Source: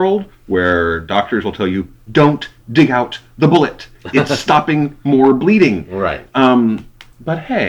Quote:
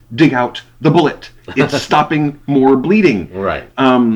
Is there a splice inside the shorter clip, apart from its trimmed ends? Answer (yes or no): no